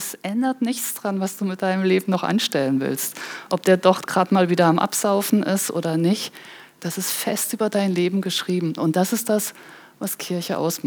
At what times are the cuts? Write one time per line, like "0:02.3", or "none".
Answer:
0:06.8